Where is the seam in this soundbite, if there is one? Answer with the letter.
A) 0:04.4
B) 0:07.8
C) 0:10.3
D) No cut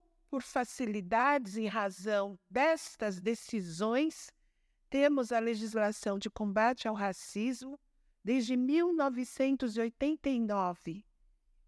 D